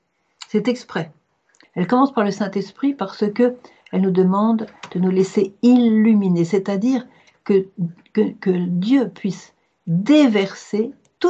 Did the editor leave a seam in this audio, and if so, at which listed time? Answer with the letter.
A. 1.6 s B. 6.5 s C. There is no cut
A